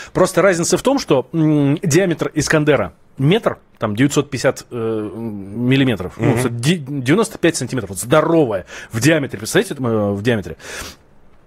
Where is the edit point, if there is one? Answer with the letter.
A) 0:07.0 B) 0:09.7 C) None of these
B